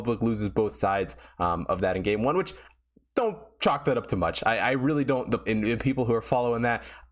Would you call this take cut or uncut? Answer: cut